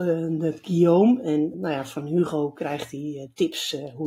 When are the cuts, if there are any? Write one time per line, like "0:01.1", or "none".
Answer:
0:01.5